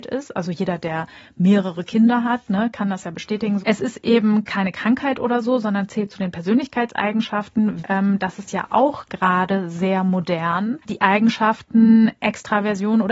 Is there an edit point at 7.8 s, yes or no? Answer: yes